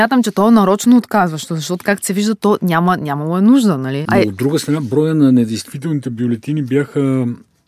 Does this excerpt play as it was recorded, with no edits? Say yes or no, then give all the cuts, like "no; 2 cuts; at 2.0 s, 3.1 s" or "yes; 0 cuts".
no; 1 cut; at 4.0 s